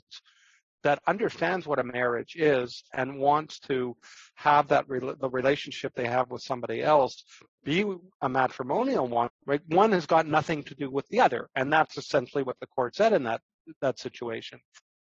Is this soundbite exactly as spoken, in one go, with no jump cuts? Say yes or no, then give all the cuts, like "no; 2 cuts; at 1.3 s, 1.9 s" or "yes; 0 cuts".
no; 1 cut; at 9.3 s